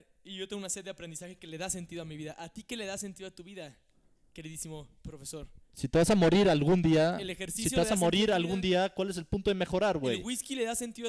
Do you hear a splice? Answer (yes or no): no